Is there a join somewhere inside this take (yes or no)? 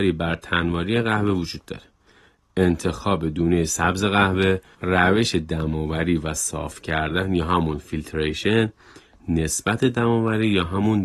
yes